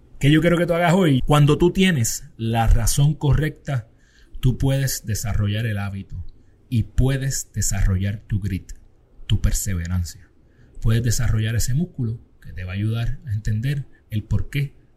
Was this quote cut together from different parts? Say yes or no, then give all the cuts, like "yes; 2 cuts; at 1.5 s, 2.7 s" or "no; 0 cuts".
yes; 1 cut; at 1.2 s